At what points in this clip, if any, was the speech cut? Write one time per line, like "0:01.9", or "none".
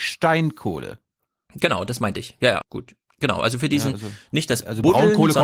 0:02.6